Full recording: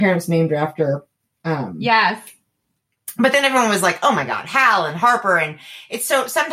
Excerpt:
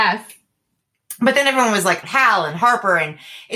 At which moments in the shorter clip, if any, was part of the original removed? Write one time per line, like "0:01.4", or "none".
0:02.0